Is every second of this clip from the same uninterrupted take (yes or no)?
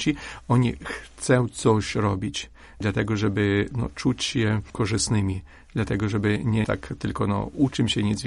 yes